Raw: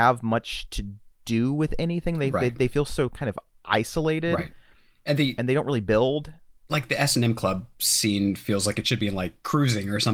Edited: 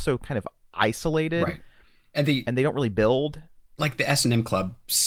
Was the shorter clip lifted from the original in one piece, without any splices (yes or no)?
yes